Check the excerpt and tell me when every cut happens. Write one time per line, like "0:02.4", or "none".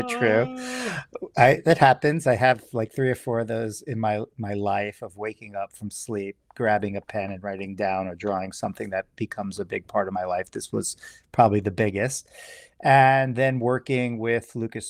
none